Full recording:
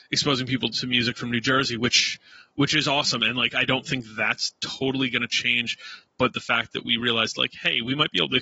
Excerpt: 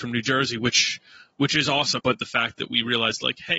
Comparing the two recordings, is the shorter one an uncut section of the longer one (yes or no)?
no